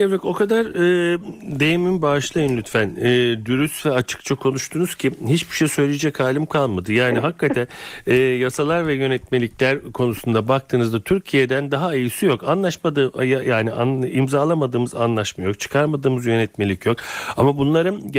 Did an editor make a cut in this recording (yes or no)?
no